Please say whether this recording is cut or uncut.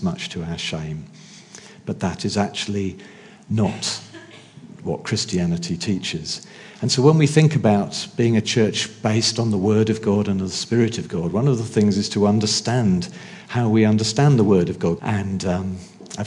cut